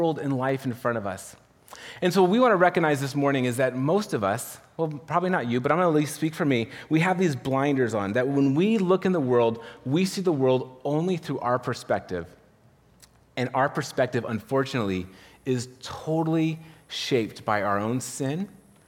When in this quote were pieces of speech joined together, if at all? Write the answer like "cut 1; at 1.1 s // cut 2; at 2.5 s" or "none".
none